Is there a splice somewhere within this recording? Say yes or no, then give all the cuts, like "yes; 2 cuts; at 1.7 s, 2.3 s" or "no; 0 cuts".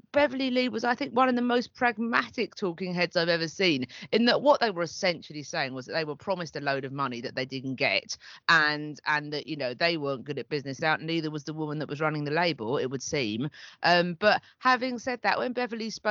yes; 1 cut; at 10.8 s